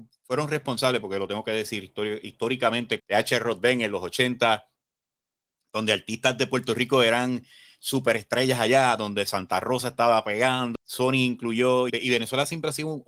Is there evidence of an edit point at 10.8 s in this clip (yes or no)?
yes